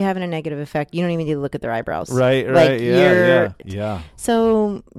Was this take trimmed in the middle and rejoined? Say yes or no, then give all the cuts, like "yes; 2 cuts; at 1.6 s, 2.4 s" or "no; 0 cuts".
yes; 1 cut; at 3.6 s